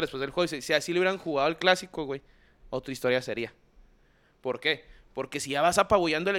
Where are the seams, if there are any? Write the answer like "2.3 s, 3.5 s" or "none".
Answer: none